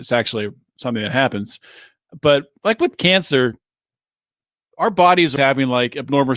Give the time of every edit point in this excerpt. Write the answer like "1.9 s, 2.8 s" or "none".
5.4 s